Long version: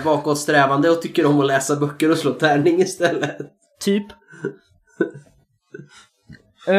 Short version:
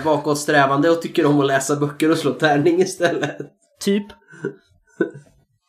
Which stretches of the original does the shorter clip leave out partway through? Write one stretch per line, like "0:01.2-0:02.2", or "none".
none